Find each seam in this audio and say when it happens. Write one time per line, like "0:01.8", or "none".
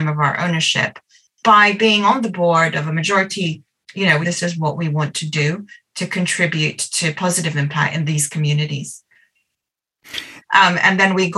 0:04.2
0:10.4